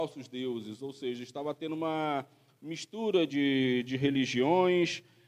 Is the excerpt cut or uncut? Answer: cut